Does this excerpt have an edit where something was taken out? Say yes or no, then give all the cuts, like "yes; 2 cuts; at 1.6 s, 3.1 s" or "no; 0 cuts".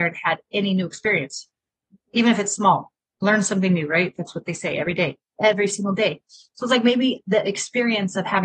no; 0 cuts